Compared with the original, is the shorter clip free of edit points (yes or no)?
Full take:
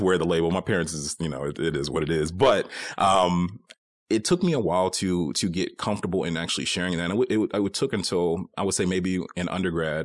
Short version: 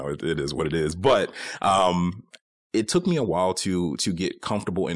yes